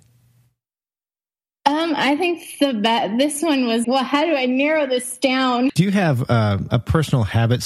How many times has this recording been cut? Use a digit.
2